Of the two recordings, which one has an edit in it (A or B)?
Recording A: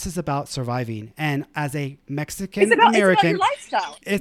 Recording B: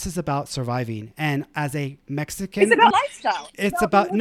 B